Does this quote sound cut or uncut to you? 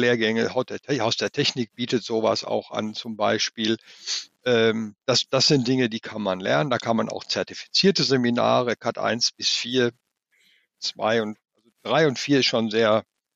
uncut